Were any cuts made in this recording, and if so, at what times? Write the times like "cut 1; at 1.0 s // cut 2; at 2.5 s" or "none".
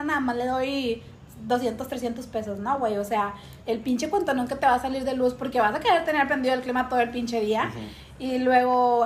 none

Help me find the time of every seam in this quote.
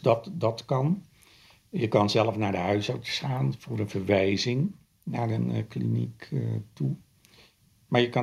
none

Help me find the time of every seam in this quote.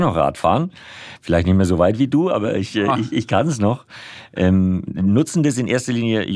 none

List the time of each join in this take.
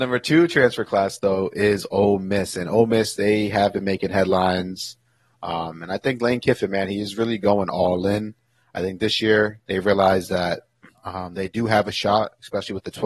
cut 1; at 9.6 s

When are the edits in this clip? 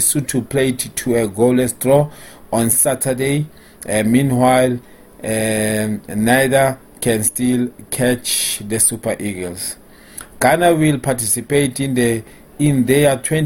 none

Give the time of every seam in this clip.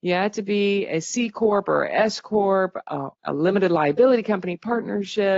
cut 1; at 3.1 s

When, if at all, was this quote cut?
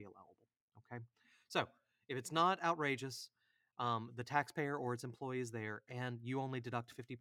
none

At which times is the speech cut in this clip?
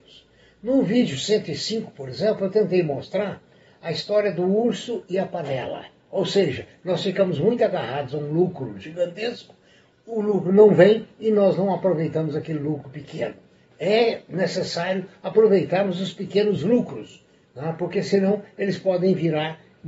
none

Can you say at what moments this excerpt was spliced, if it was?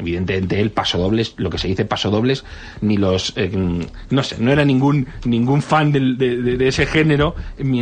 cut 1; at 4.1 s

